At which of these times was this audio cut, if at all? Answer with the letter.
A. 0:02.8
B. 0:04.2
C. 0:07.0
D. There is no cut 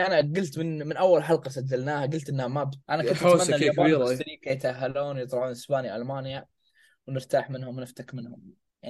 A